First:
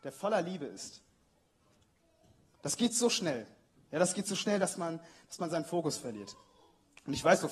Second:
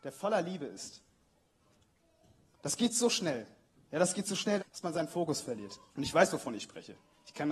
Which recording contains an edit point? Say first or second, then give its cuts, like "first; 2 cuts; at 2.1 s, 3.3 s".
second; 2 cuts; at 4.6 s, 5.9 s